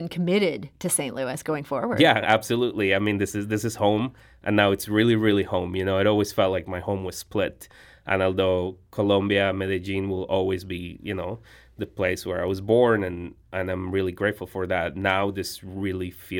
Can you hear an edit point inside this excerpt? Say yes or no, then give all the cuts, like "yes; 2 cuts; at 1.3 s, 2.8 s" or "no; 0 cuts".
no; 0 cuts